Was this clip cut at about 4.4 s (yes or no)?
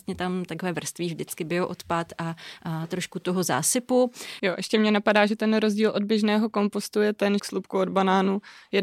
yes